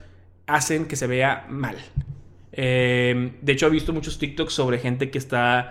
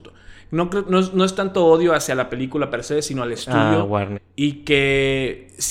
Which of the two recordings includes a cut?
second; 1 cut; at 4.1 s

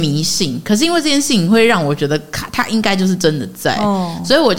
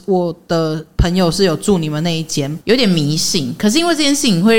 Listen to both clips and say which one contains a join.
second; 1 cut; at 2.6 s

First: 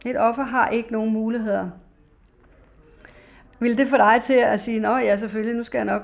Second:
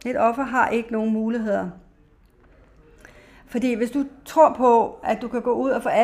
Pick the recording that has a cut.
first; 1 cut; at 3.5 s

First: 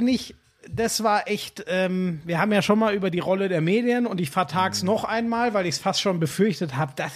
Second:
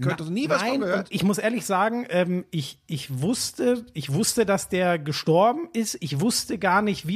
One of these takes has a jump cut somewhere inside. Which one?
second; 1 cut; at 1.1 s

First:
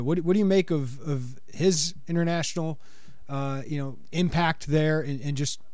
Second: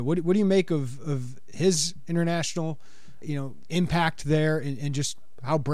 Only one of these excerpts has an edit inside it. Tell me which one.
second; 1 cut; at 3.2 s

